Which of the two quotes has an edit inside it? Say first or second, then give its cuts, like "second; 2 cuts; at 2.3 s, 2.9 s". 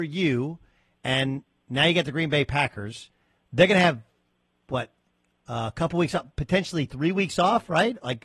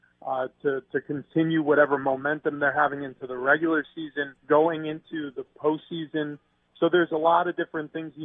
second; 1 cut; at 4.4 s